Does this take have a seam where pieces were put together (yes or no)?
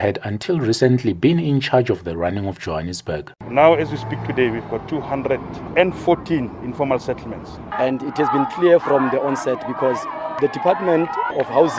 yes